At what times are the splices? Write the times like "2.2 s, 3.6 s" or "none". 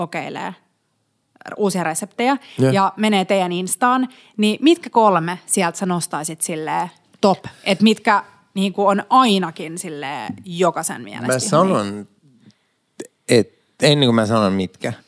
none